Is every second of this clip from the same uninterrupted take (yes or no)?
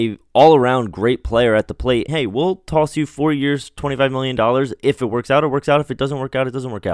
no